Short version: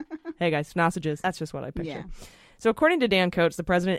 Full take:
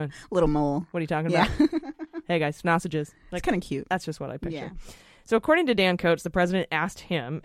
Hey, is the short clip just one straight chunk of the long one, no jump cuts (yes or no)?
no